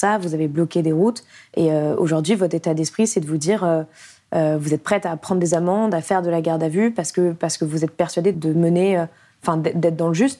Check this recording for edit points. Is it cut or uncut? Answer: cut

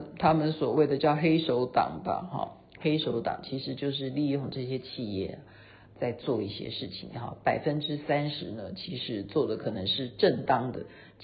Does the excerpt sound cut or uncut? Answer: uncut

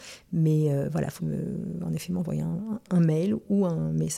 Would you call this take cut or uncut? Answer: cut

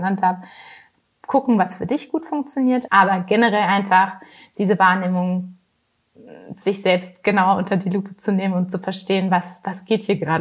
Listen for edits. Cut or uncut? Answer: cut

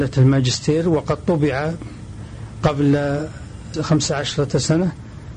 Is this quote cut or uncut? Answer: cut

